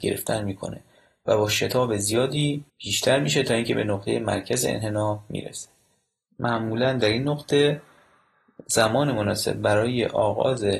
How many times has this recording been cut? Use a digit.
1